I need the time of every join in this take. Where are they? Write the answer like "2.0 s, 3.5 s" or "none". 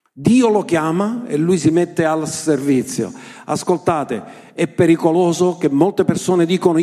none